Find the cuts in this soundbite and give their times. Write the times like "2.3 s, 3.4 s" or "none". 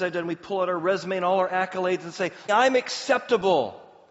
2.5 s